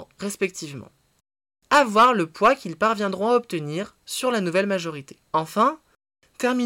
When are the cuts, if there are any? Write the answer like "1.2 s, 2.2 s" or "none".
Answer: 5.3 s